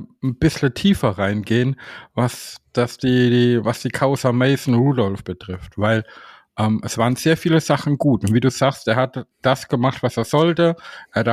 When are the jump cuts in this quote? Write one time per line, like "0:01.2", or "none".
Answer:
none